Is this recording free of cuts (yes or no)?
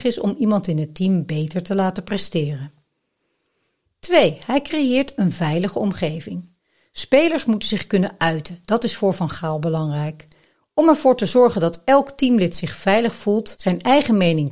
yes